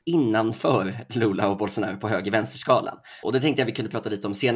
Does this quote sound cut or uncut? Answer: cut